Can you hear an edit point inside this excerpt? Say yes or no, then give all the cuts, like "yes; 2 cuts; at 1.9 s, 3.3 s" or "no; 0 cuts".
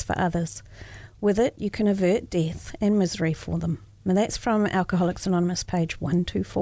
no; 0 cuts